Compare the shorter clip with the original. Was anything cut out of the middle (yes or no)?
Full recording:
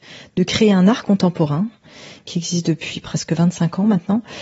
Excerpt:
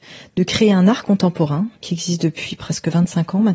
yes